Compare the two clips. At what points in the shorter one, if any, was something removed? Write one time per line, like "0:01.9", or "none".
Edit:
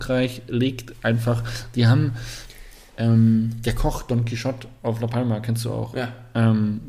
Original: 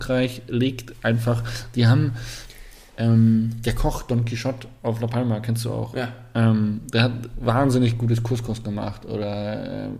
none